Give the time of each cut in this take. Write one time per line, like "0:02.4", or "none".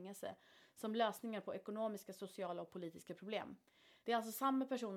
0:04.0